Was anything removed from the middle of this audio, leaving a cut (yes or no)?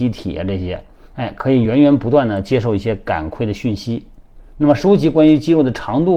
no